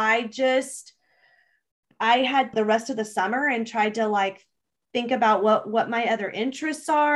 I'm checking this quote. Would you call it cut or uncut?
cut